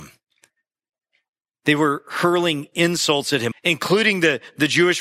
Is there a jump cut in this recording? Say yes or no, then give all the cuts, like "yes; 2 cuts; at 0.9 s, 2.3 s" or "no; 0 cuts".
yes; 1 cut; at 3.5 s